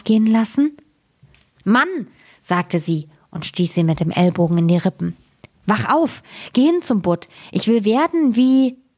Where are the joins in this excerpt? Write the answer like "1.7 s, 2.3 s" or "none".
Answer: none